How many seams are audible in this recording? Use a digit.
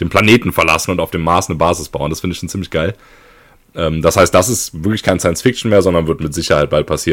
0